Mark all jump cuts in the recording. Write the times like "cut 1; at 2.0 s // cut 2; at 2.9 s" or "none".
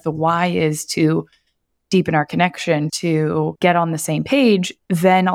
cut 1; at 2.9 s